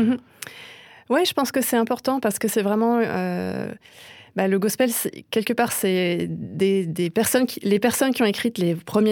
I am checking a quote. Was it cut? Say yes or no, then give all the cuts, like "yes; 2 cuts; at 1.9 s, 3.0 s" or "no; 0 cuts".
no; 0 cuts